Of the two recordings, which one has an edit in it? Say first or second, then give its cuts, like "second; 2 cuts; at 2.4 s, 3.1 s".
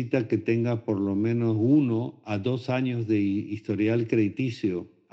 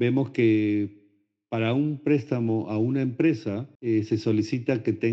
second; 1 cut; at 3.8 s